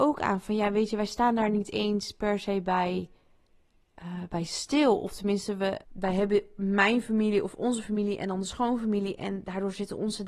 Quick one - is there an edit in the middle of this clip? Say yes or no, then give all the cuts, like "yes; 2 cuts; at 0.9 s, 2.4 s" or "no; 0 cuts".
yes; 1 cut; at 5.8 s